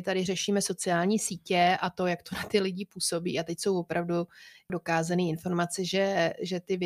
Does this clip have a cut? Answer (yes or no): no